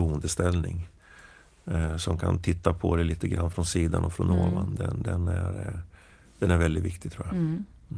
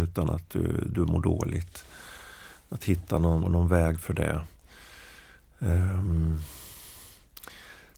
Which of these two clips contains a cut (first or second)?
second